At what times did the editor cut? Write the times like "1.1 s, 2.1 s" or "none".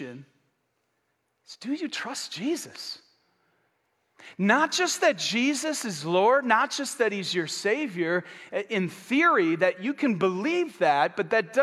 none